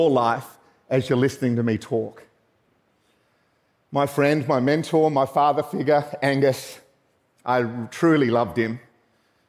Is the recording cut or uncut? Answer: uncut